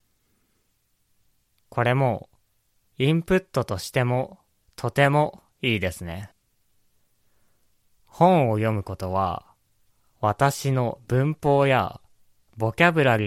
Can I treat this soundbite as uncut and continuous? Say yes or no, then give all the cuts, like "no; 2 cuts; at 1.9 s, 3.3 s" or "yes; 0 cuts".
yes; 0 cuts